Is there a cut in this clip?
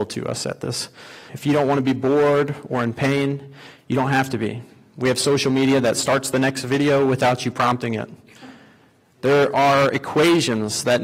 yes; 1 cut; at 1.3 s

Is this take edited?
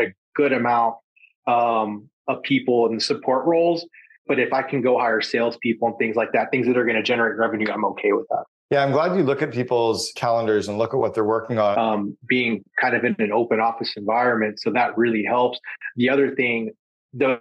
yes; 2 cuts; at 10.1 s, 11.7 s

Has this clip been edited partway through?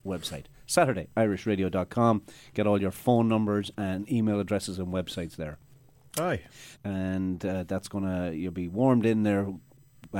yes; 1 cut; at 6.7 s

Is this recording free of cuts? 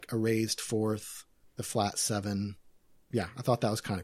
yes; 0 cuts

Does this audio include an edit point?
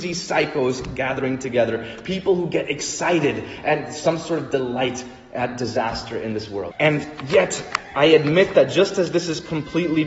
yes; 1 cut; at 6.7 s

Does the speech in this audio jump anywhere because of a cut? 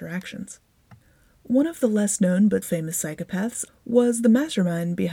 yes; 2 cuts; at 2.6 s, 3.7 s

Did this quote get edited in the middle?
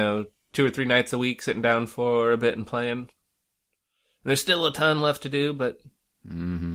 no; 0 cuts

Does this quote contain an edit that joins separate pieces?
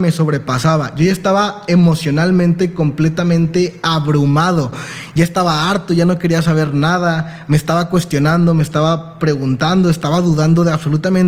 no; 0 cuts

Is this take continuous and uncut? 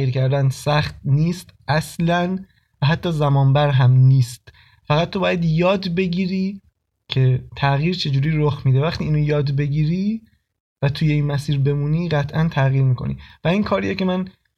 yes; 0 cuts

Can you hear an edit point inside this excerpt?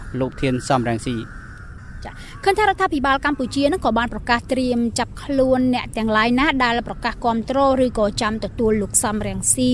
no; 0 cuts

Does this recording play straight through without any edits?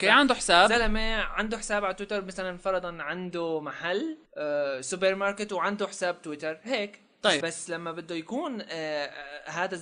no; 2 cuts; at 4.3 s, 7.4 s

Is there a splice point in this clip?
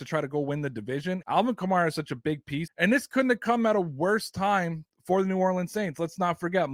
yes; 2 cuts; at 1.2 s, 2.7 s

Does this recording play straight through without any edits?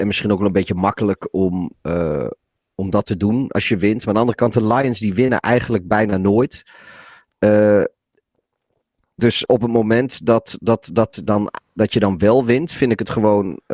yes; 0 cuts

